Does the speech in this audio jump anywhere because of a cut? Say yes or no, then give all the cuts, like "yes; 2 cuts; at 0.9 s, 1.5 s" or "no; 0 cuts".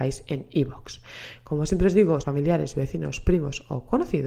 yes; 1 cut; at 2.2 s